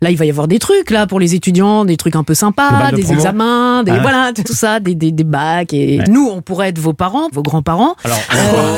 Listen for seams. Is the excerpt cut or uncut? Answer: cut